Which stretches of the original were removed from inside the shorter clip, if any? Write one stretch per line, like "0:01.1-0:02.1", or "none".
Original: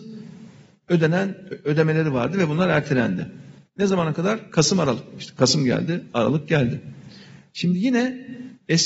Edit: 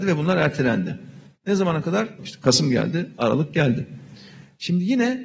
0:04.5-0:05.1